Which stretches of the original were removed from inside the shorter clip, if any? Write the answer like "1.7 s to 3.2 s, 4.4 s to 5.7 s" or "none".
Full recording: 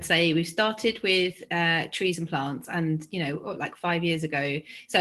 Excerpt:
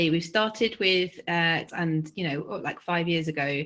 1.9 s to 2.6 s